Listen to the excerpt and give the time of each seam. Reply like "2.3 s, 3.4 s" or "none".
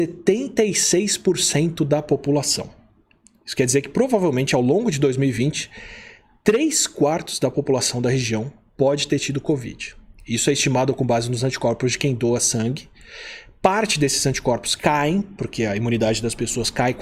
none